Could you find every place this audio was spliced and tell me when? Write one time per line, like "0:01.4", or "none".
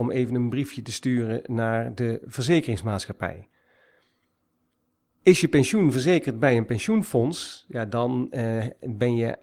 none

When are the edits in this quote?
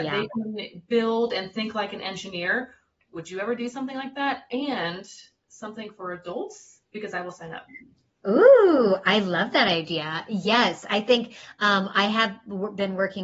none

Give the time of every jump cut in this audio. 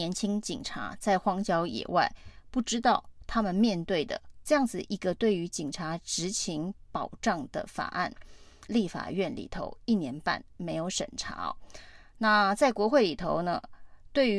0:04.4
0:08.7

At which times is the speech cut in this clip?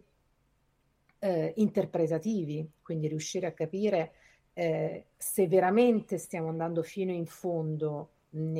0:05.1

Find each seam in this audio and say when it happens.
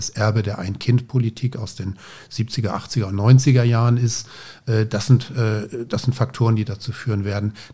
none

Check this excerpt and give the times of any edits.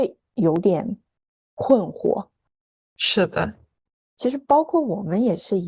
none

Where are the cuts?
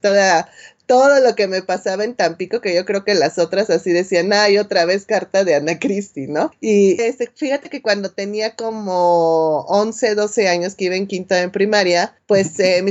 0:07.0

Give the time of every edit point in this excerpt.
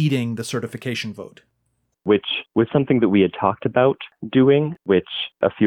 none

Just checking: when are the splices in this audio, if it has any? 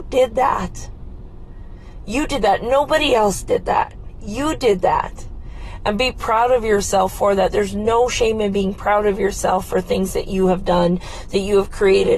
none

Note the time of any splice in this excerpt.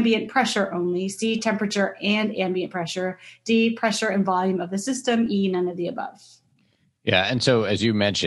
none

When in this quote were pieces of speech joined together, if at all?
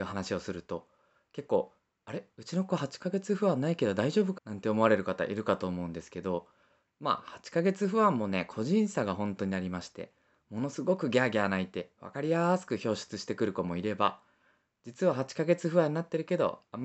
0:04.4

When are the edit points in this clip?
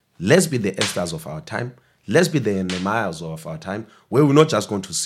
none

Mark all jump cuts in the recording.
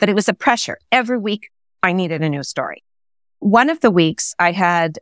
none

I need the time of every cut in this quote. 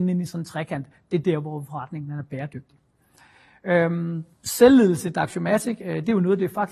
0:04.3

